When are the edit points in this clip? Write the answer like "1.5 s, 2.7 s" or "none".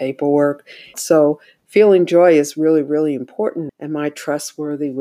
0.9 s, 3.7 s

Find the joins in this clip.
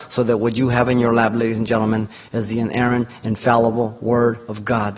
none

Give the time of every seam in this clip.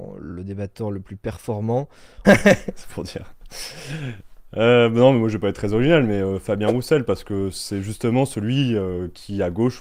2.2 s

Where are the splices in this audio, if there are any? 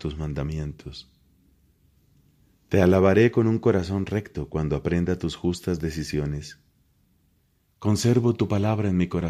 7.6 s

